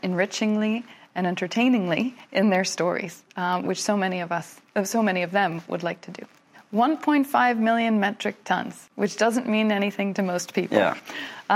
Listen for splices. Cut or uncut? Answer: cut